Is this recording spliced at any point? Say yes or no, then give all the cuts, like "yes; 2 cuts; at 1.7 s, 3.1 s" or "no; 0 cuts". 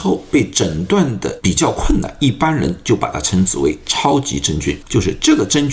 yes; 2 cuts; at 2.2 s, 4.8 s